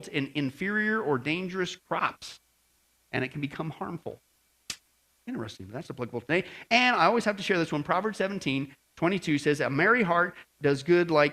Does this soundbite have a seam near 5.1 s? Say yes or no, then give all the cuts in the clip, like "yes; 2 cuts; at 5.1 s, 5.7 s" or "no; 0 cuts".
no; 0 cuts